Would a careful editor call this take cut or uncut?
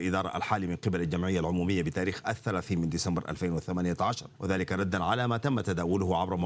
cut